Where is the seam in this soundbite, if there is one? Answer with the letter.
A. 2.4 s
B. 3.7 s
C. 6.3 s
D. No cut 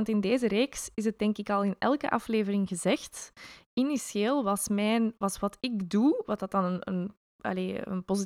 D